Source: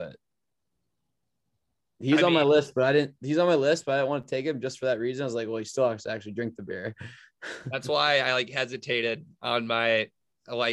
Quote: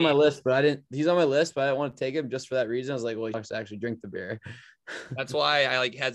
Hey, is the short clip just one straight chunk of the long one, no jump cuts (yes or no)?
no